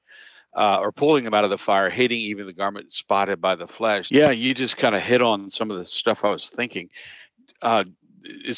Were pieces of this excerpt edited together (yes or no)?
yes